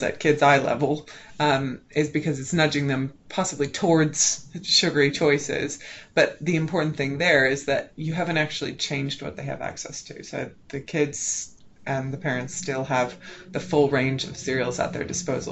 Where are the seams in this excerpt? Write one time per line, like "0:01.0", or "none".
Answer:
none